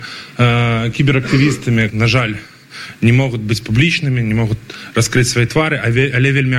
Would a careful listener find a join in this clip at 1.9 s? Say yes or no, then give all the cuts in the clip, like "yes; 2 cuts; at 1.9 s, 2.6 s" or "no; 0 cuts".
yes; 1 cut; at 1.9 s